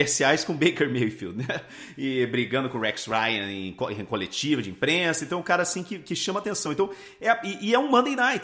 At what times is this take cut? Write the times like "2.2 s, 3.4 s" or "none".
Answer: none